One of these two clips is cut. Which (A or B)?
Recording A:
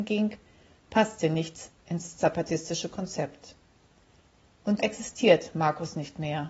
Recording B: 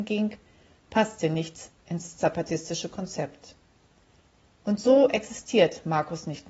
A